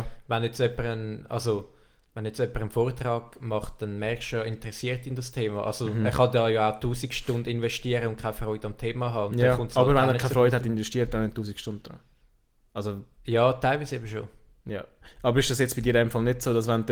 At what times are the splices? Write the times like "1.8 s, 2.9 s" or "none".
none